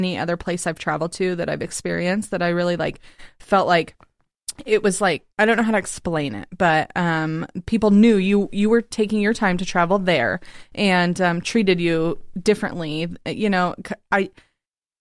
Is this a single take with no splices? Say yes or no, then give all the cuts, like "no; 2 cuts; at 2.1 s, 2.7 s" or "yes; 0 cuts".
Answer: no; 1 cut; at 5.3 s